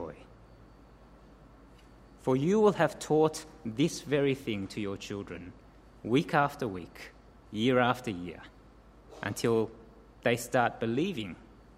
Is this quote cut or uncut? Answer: uncut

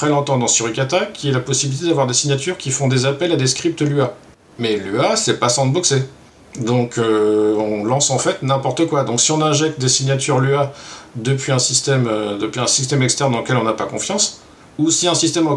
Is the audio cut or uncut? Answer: uncut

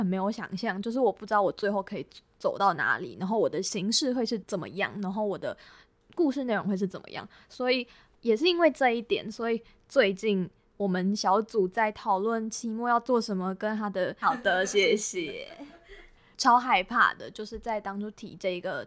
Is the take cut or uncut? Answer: cut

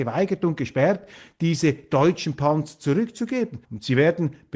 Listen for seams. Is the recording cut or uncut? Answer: cut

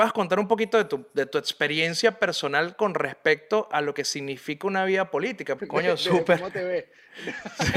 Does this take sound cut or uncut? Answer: cut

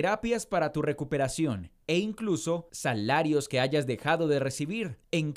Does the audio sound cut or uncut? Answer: uncut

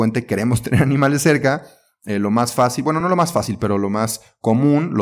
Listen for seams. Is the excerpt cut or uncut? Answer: uncut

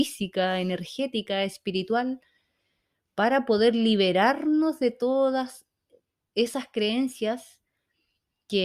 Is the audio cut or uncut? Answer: uncut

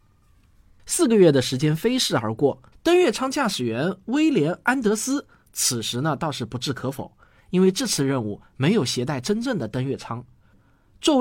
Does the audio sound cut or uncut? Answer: cut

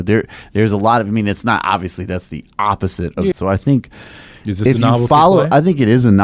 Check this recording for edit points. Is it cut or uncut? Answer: cut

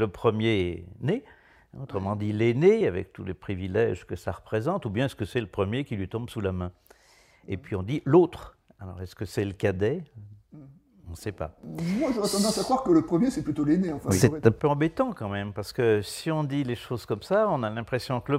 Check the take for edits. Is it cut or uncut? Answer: uncut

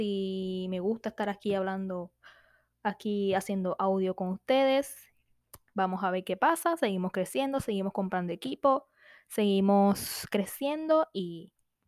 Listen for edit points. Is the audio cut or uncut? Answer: uncut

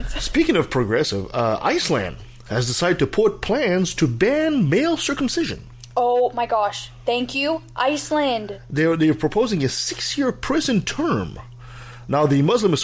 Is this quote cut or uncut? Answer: uncut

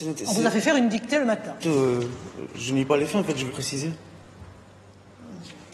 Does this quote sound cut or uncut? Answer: cut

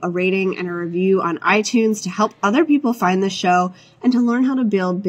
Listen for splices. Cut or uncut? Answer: uncut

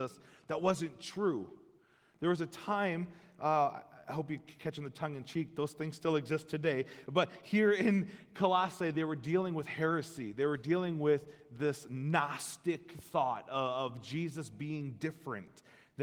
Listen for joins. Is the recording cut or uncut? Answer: uncut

